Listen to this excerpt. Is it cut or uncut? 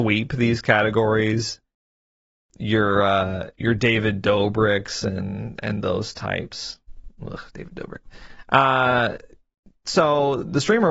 uncut